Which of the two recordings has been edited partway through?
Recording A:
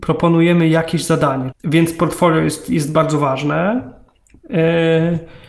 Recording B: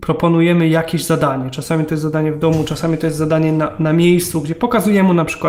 A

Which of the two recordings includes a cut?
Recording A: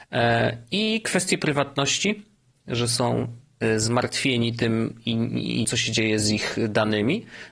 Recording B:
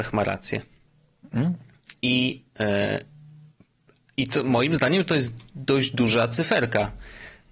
A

